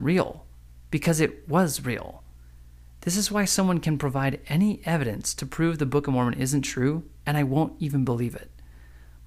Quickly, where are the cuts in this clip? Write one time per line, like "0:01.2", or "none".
none